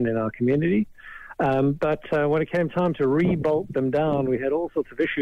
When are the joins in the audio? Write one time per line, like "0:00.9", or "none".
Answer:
none